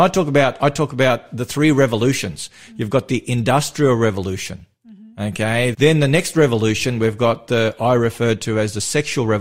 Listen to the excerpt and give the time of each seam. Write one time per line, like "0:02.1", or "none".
0:05.7